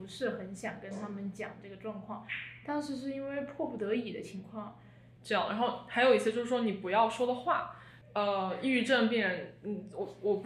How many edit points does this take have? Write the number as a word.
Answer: two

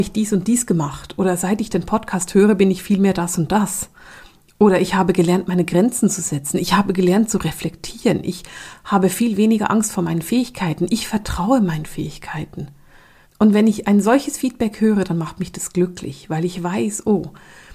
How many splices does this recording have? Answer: one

